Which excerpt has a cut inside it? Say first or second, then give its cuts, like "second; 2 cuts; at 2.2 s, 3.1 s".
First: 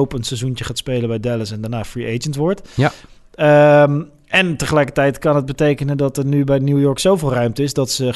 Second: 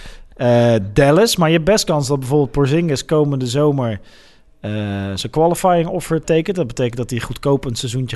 second; 1 cut; at 6.2 s